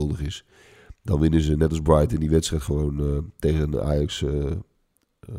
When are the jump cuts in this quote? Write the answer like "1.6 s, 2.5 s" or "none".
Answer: none

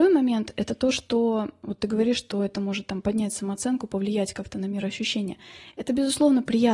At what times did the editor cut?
none

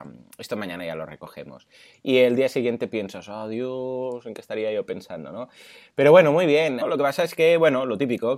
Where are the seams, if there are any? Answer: 6.8 s

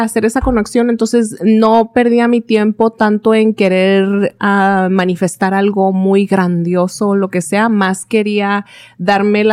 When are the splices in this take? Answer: none

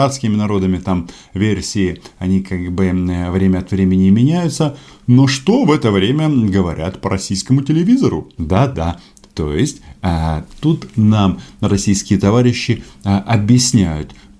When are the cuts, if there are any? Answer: 8.4 s

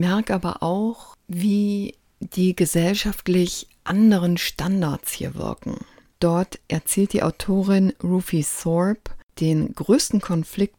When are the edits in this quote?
6.1 s

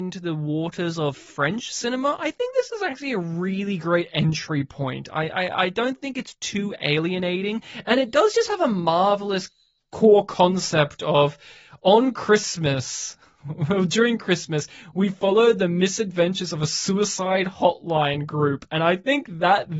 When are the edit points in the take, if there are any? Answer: none

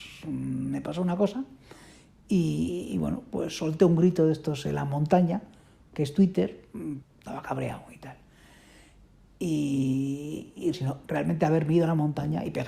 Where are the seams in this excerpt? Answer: 7.0 s, 10.7 s

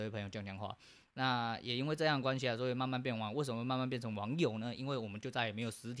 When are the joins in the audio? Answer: none

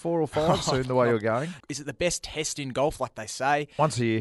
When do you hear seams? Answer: 1.6 s

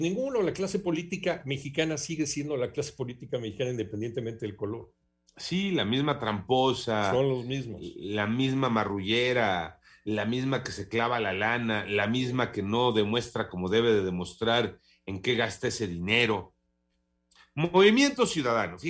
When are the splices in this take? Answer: none

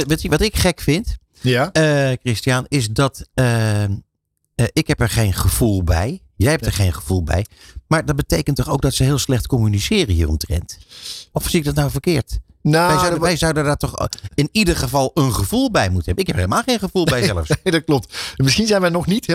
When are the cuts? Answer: none

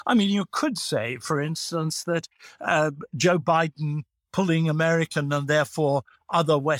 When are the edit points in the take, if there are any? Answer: none

